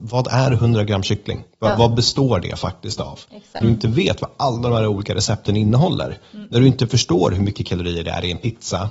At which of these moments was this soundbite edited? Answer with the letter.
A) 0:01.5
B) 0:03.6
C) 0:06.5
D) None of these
B